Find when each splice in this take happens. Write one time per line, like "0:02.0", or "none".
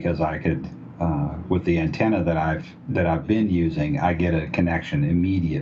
none